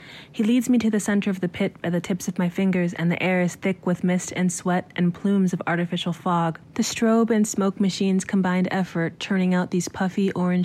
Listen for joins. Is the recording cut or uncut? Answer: cut